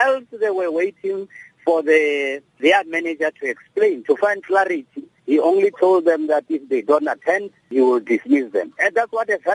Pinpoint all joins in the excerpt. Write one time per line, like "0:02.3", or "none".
none